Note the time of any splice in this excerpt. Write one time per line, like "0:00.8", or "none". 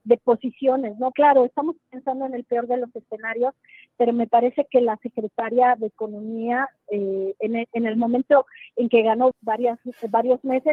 0:01.1
0:09.3